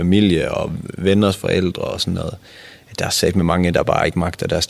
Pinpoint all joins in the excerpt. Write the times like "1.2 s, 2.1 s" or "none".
none